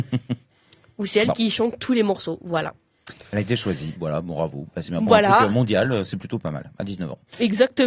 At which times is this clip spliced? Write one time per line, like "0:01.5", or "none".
0:04.0